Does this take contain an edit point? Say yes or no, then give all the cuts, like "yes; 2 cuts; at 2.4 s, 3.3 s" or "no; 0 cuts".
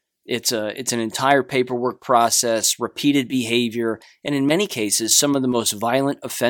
no; 0 cuts